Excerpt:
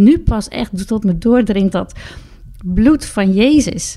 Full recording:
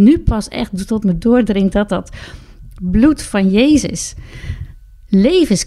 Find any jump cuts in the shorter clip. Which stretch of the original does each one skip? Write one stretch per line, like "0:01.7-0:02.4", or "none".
0:01.7-0:01.9